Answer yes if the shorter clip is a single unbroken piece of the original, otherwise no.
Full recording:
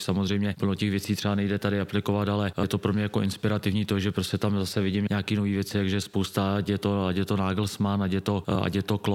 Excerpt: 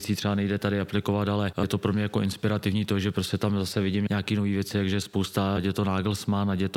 no